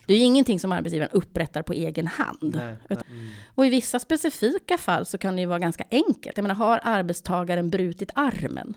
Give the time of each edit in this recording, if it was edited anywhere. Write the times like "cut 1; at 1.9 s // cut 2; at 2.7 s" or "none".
cut 1; at 3.0 s